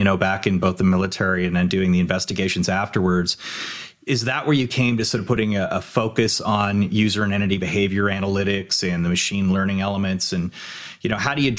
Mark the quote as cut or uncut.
uncut